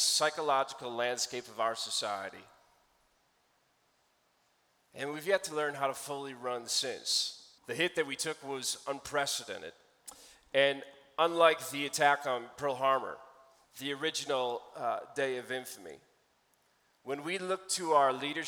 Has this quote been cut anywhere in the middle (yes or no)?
yes